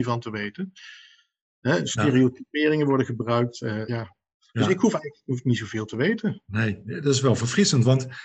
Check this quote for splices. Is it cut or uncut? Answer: uncut